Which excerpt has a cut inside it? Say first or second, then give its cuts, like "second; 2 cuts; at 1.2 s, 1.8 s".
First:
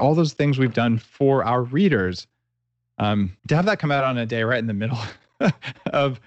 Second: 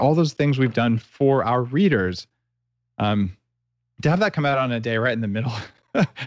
first; 1 cut; at 3.4 s